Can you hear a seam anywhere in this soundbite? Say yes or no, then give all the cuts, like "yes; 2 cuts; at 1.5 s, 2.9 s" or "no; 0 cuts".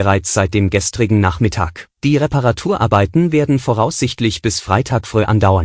yes; 1 cut; at 2.0 s